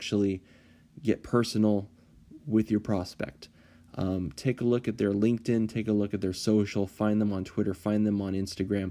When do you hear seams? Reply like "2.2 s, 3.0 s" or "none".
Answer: none